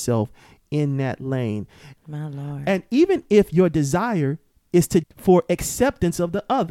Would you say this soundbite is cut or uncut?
cut